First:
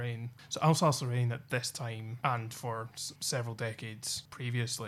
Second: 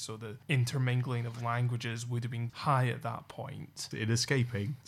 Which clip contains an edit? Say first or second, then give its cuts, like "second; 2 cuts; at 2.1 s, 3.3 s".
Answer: second; 2 cuts; at 2.5 s, 3.9 s